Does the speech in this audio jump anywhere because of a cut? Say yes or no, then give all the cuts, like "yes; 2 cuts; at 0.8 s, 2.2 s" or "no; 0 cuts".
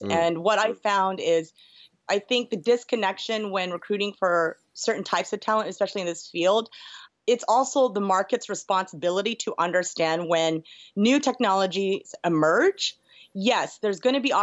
no; 0 cuts